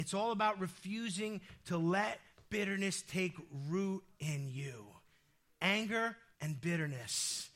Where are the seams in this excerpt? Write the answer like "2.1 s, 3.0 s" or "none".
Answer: 6.3 s